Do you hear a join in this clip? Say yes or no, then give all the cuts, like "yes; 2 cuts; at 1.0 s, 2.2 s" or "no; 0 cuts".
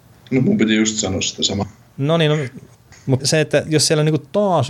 yes; 1 cut; at 3.2 s